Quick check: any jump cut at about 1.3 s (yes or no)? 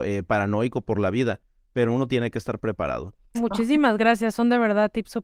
no